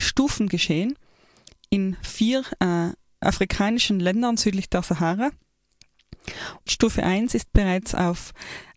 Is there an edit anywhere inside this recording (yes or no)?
yes